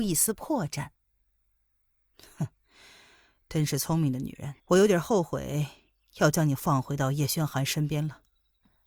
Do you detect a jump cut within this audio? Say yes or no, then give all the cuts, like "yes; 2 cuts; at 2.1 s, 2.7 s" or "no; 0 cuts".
yes; 1 cut; at 4.6 s